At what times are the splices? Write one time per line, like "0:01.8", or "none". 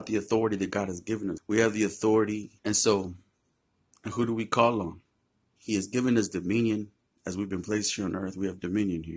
0:01.4
0:02.6
0:05.6